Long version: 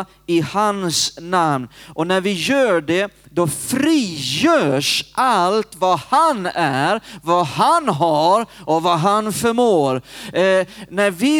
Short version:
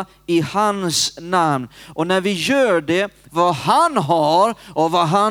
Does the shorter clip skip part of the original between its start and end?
yes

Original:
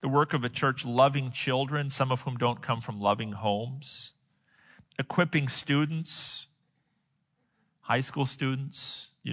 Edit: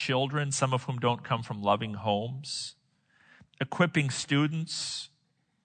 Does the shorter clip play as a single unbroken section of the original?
yes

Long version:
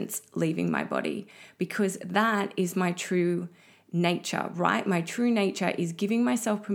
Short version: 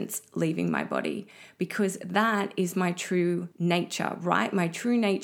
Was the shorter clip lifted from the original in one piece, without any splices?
no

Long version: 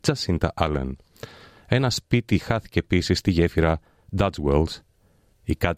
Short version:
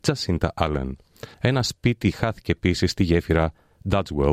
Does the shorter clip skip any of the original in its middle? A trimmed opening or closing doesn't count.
yes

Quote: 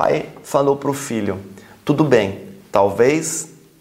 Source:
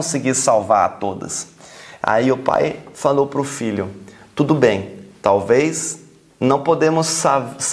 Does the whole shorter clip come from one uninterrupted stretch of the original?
yes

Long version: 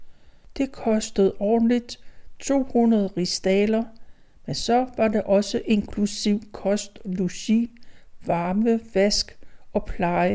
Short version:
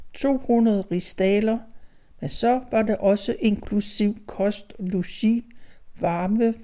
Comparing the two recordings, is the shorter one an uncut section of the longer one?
yes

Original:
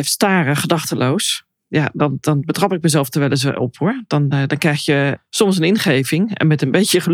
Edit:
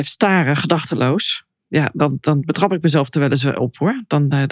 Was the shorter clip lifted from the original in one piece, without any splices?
yes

